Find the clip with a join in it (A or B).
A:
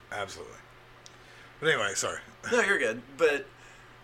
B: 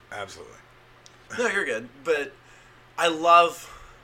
B